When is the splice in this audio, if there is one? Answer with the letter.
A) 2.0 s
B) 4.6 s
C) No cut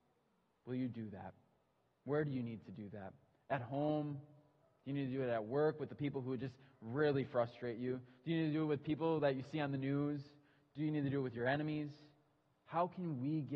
C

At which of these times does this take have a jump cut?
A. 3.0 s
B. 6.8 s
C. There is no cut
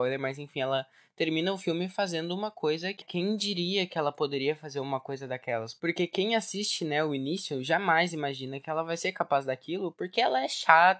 A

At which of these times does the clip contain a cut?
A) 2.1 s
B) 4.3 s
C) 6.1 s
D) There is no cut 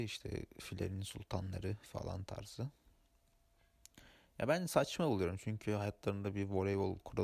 D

